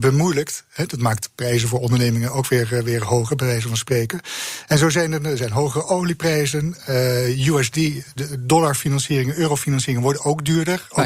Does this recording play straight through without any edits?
yes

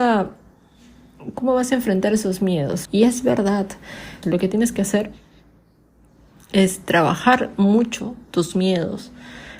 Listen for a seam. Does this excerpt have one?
yes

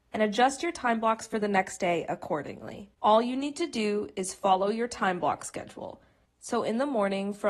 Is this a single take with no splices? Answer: no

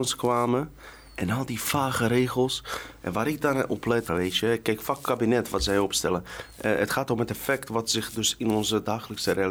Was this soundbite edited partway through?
yes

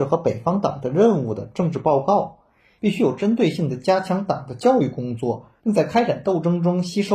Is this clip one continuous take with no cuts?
no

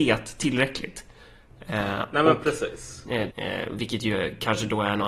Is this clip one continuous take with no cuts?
no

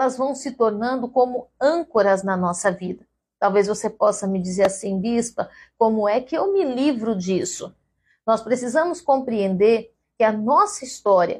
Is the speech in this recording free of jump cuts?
yes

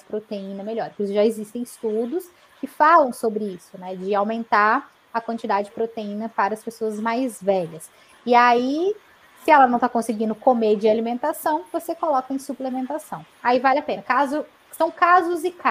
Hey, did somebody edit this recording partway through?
no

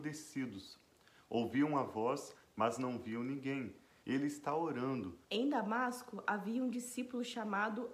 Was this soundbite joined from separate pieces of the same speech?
yes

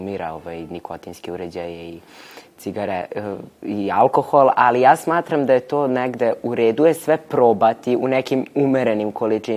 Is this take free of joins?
yes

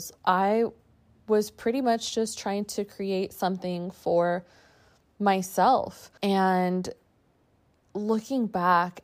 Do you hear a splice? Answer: yes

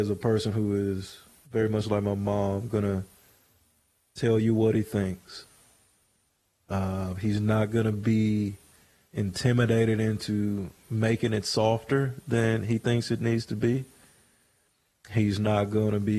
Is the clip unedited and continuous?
yes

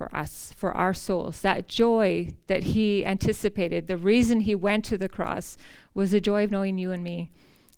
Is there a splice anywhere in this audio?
no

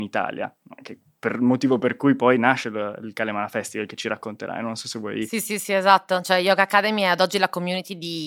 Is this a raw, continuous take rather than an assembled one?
yes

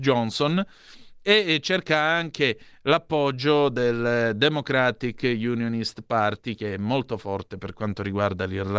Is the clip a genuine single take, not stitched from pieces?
yes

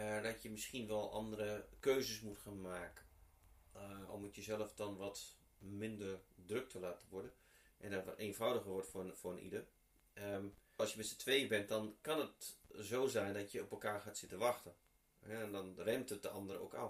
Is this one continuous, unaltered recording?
no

